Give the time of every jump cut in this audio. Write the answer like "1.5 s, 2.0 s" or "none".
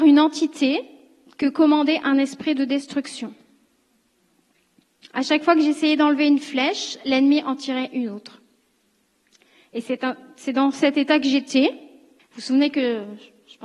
12.2 s